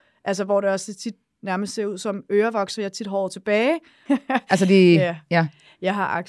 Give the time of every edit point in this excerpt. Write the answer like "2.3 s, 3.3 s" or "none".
4.1 s

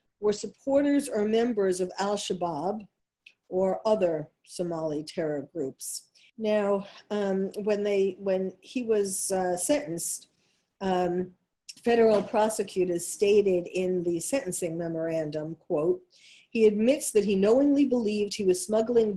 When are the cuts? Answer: 6.3 s

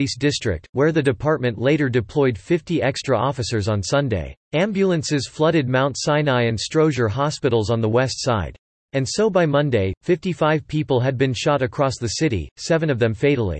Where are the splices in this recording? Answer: 4.4 s

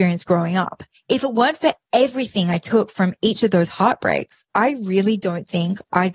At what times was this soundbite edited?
0.9 s

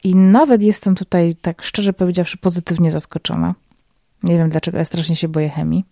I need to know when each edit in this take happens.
none

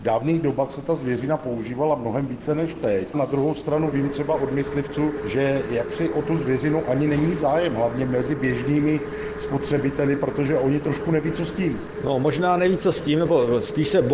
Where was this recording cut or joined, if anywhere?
3.1 s

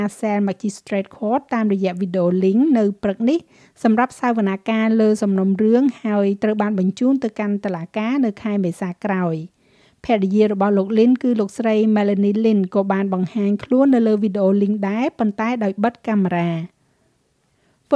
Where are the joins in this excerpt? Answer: none

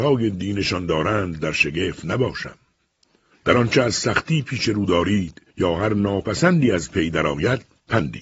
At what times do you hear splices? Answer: 3.3 s, 5.5 s

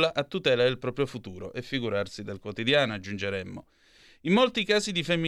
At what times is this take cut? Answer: none

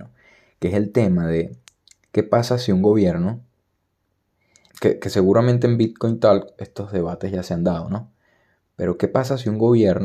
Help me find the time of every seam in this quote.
4.7 s, 6.6 s

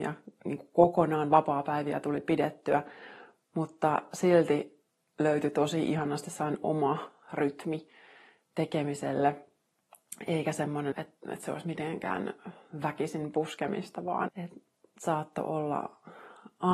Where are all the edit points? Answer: 10.9 s, 14.3 s

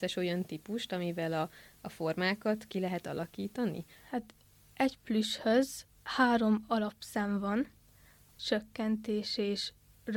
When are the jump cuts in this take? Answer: 4.0 s, 8.4 s

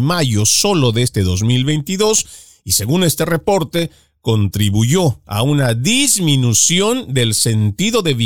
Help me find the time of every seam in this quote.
none

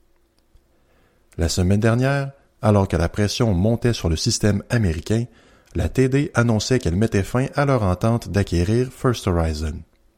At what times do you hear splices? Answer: none

